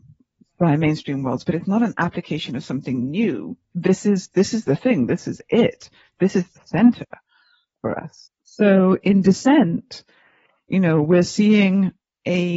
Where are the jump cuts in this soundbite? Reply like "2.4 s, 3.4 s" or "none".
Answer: 3.7 s